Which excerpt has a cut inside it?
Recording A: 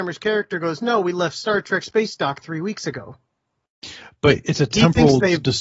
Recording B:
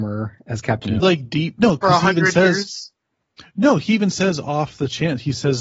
B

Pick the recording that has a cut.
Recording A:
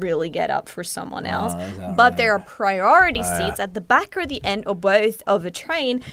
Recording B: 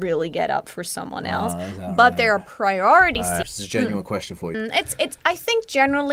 B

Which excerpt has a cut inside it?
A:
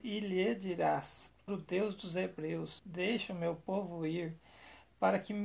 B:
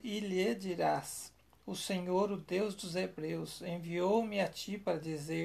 A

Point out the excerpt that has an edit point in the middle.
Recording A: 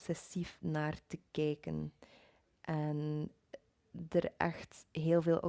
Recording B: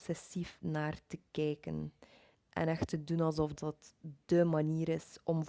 B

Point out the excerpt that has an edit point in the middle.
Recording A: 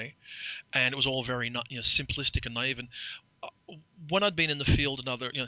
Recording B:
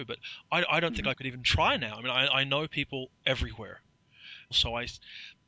B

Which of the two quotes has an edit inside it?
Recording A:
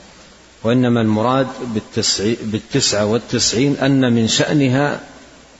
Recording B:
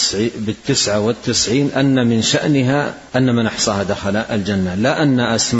B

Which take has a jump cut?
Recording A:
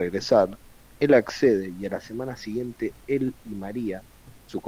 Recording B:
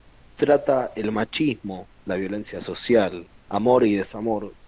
B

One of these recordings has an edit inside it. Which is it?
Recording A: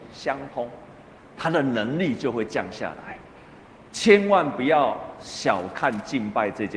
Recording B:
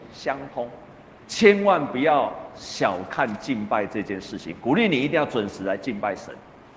B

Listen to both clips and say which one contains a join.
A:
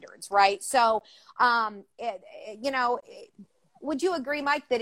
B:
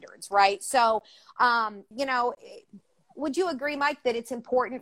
B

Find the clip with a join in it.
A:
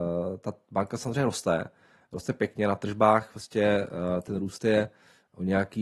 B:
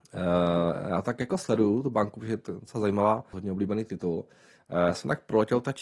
B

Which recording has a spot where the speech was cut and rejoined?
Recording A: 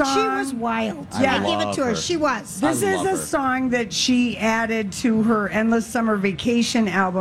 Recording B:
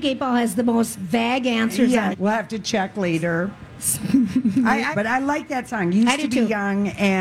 B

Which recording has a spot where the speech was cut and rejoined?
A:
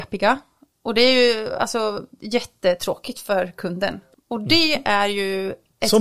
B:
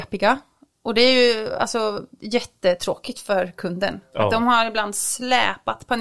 A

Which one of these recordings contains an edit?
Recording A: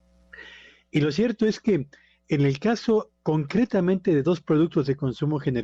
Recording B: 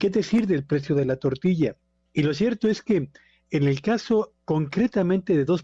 B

